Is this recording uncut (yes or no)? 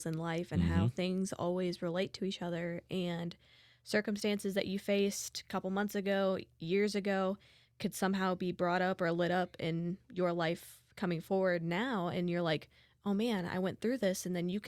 yes